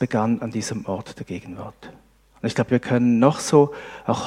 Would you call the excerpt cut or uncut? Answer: cut